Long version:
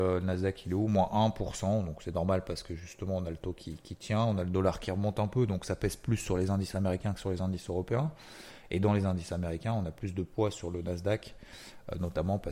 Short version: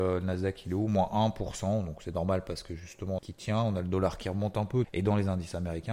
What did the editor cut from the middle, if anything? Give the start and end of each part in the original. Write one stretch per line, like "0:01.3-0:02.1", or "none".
0:03.2-0:03.8
0:05.5-0:08.6